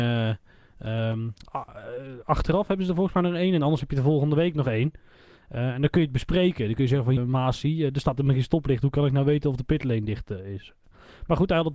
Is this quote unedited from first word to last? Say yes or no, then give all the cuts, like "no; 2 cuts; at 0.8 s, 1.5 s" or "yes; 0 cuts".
no; 1 cut; at 7.2 s